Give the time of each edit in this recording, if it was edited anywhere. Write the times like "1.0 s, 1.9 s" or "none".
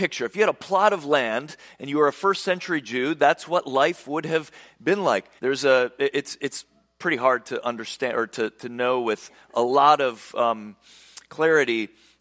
5.4 s